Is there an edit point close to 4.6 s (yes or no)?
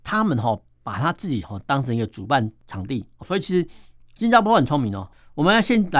no